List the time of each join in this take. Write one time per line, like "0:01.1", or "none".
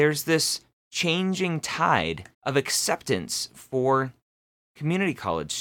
0:02.3